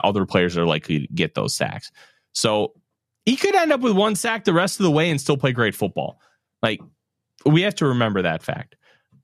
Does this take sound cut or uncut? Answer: uncut